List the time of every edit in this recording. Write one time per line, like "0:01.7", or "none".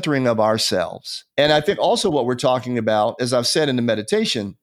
0:01.3